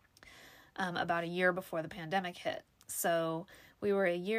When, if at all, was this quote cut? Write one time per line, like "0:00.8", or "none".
none